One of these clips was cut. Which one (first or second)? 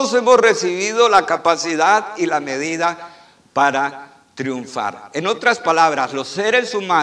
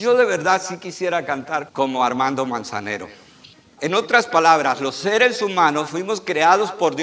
second